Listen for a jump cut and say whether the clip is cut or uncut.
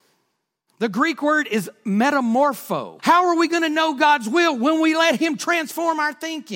cut